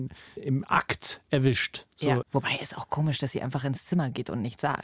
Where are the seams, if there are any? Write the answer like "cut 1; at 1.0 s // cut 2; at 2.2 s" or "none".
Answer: cut 1; at 2.2 s